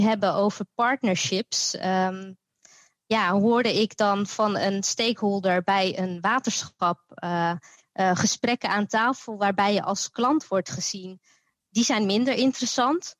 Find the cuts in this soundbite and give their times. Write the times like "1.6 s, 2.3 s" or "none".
7.8 s